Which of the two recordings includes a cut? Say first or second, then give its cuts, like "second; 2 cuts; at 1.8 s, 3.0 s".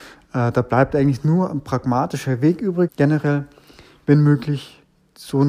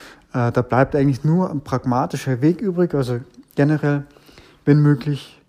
first; 1 cut; at 2.9 s